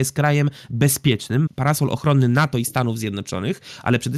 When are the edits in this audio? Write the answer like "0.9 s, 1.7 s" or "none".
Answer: 1.5 s